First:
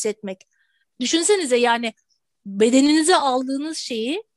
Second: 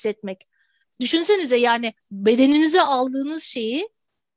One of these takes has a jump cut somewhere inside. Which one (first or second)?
second